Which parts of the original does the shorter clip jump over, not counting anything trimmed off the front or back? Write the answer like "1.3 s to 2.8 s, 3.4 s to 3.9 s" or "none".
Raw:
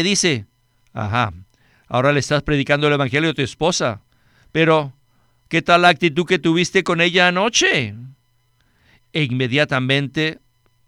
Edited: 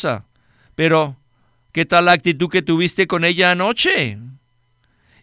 none